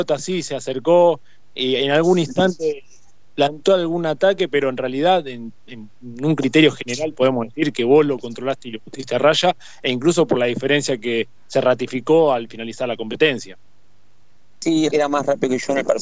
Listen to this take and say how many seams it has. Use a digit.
1